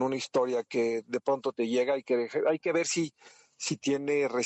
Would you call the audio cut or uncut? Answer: uncut